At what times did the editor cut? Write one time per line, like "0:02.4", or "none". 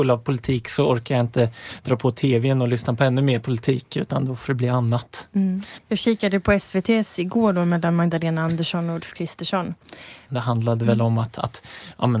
0:05.8
0:10.3

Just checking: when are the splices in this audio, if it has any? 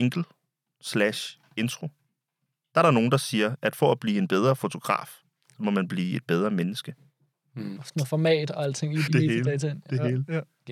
0:07.8
0:09.1

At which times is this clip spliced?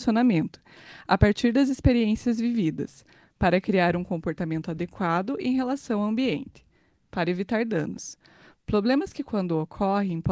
none

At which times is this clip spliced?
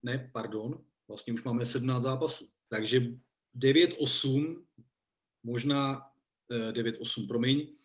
0:02.7

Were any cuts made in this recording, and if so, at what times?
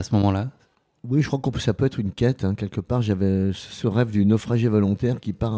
none

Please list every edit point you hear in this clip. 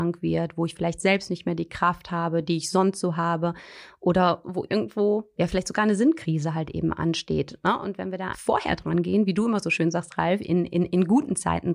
0:08.3

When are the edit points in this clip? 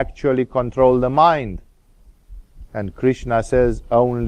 none

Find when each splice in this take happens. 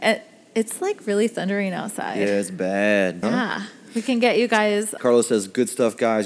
0:03.2
0:05.0

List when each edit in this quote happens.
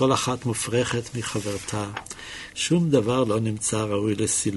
0:02.5

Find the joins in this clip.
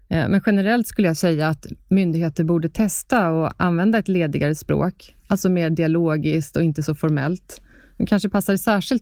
none

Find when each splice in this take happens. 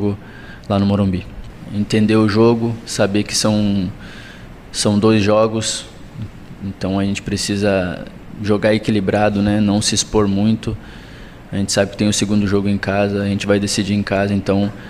none

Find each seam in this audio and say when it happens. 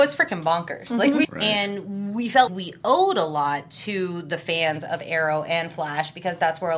0:01.2
0:02.5

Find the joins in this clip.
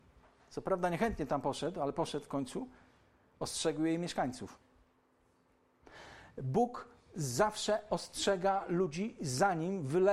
none

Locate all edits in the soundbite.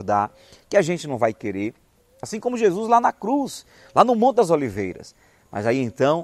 0:02.2

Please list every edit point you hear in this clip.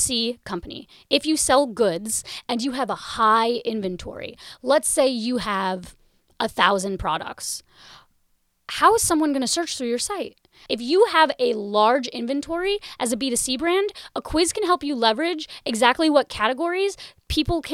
0:10.7

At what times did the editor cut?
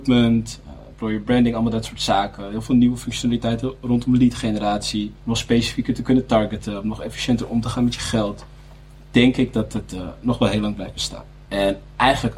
0:05.2
0:11.4

